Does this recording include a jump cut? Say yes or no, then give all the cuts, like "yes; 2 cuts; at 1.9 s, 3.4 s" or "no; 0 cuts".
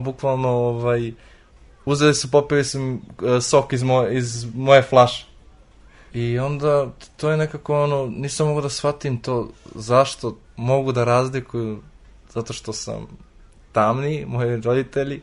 yes; 2 cuts; at 6.1 s, 10.4 s